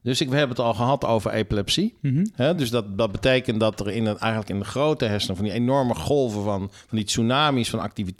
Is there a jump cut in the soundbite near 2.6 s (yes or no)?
no